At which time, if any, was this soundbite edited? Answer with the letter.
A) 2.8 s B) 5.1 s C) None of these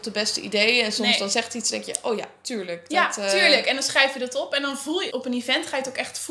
B